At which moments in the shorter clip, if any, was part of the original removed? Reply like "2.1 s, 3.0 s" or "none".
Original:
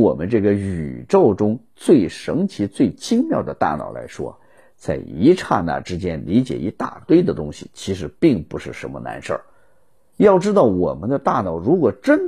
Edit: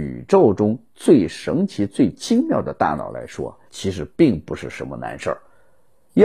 3.7 s